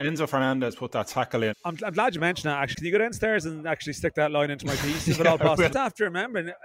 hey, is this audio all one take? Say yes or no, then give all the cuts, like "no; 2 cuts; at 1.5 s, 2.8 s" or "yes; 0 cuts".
no; 3 cuts; at 1.5 s, 2.7 s, 5.7 s